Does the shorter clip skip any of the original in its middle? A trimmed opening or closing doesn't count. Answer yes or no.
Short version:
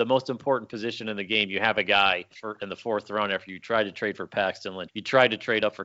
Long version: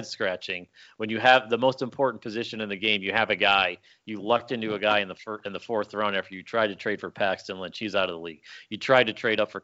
yes